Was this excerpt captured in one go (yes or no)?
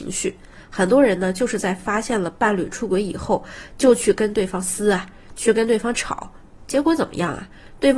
yes